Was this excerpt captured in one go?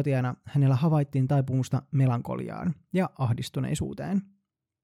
yes; 0 cuts

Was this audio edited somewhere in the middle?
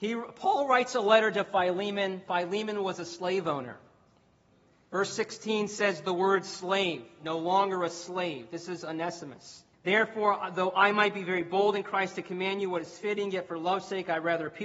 yes; 1 cut; at 9.7 s

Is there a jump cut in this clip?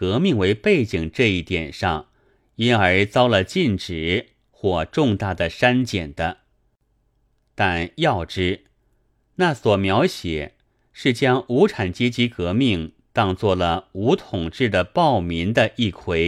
no; 0 cuts

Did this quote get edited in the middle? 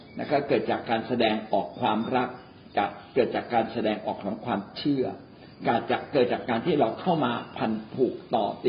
no; 0 cuts

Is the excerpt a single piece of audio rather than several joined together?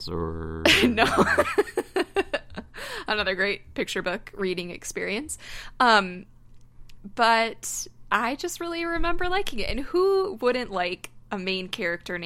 yes; 0 cuts

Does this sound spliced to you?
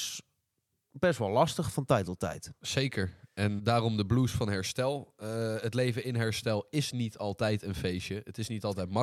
yes; 1 cut; at 3.6 s

